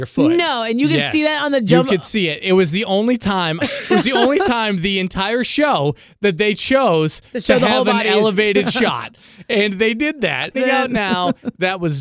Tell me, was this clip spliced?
yes; 2 cuts; at 3.6 s, 10.5 s

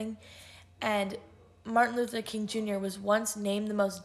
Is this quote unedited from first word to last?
yes; 0 cuts

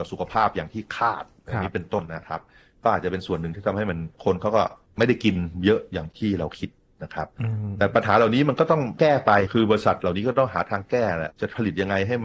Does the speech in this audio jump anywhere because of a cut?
yes; 1 cut; at 2.0 s

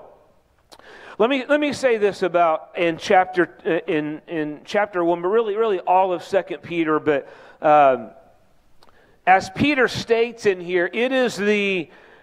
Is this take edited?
yes; 1 cut; at 2.7 s

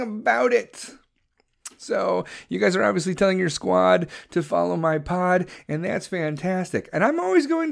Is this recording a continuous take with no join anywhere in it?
yes; 0 cuts

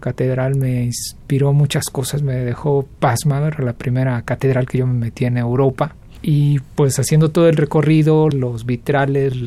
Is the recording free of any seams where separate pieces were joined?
no; 1 cut; at 8.3 s

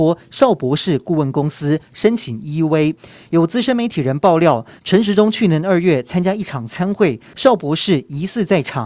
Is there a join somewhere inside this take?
no; 0 cuts

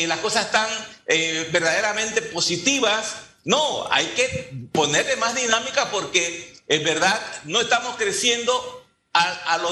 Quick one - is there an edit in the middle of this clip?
no; 0 cuts

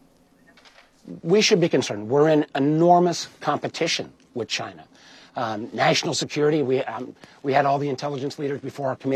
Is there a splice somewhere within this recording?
no; 0 cuts

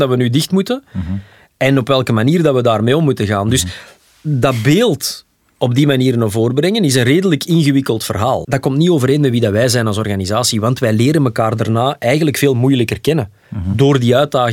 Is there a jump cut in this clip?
yes; 1 cut; at 8.4 s

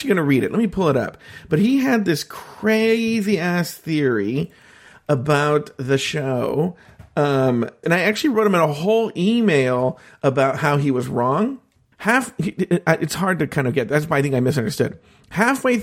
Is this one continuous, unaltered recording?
no; 2 cuts; at 7.8 s, 11.9 s

